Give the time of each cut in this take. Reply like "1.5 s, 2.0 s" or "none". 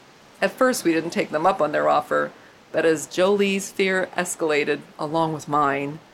none